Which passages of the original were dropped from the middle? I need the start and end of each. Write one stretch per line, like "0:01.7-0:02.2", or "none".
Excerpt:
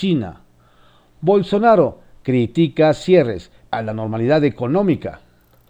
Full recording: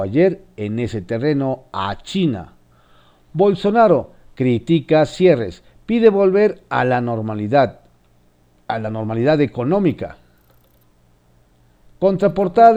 0:05.8-0:08.7